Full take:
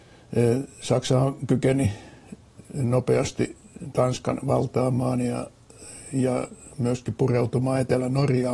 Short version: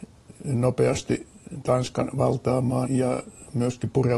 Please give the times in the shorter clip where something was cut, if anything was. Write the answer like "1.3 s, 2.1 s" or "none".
2.8 s